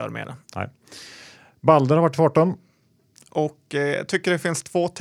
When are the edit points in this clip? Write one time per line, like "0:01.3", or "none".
0:03.2

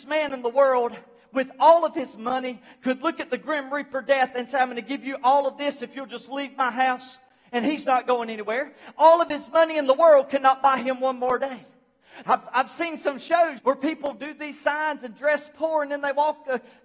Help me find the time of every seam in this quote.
0:12.2
0:13.6

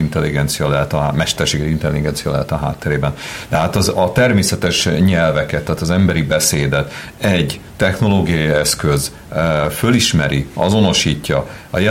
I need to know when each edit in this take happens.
none

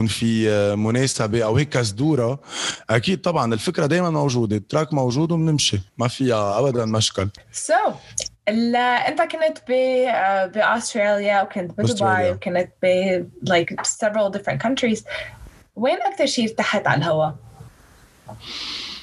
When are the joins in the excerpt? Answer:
0:05.9

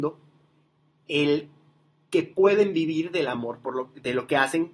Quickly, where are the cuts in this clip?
none

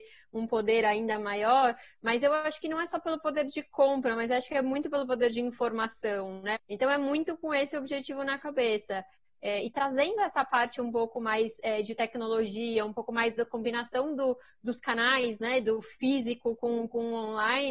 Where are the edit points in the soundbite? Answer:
0:06.5

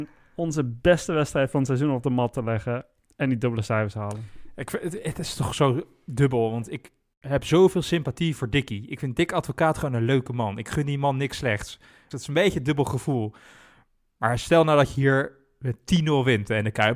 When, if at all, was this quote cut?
0:12.1

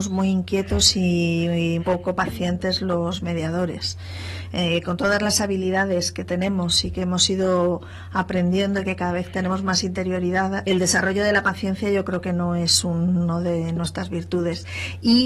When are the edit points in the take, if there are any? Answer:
0:01.8
0:10.6

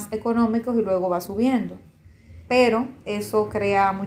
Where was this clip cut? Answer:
0:02.5

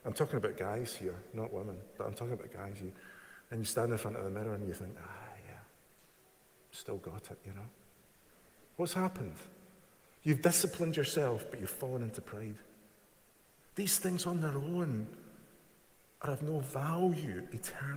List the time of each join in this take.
0:13.6

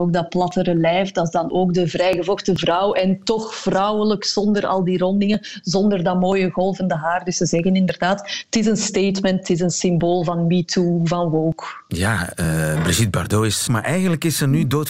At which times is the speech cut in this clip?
0:13.7

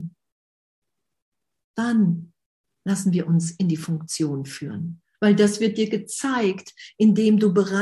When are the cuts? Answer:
0:05.1

